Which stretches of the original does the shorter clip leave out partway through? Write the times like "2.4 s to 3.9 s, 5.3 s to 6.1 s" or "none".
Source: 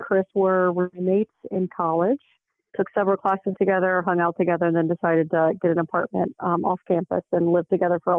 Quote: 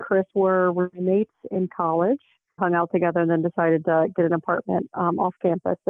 2.6 s to 4.0 s